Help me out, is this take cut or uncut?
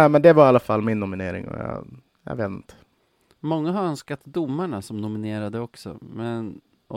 uncut